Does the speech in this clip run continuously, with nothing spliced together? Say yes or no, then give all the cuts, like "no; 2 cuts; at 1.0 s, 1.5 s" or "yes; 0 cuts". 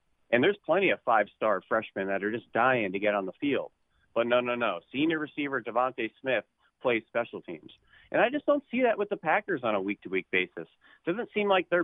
yes; 0 cuts